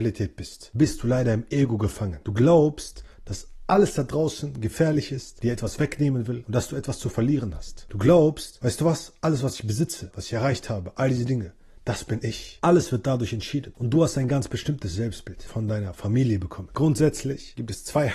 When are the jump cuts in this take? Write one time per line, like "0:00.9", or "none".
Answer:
0:10.1
0:12.6